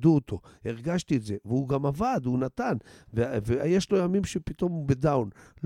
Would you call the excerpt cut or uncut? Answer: uncut